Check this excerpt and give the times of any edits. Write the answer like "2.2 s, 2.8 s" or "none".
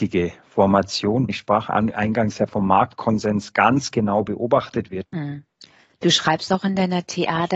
1.3 s, 5.0 s

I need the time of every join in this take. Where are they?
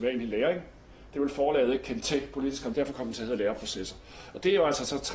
2.7 s

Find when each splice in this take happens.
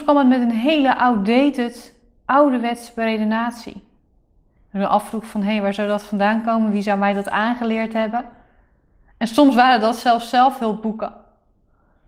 none

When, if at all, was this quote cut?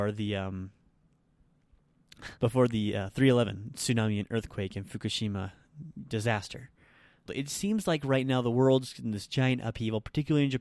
2.4 s, 7.3 s

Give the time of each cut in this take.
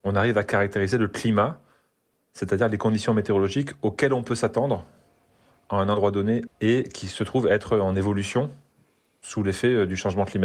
6.5 s

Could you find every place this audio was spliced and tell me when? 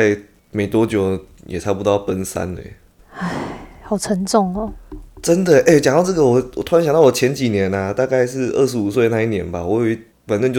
none

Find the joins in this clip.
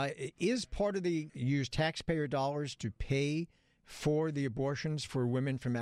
1.3 s

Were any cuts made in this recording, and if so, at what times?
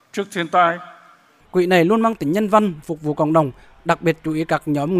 1.4 s, 2.8 s

